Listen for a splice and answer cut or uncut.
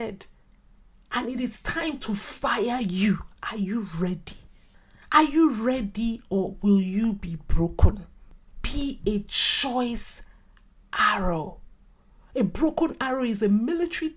uncut